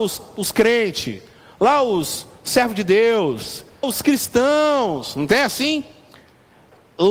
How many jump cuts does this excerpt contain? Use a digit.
1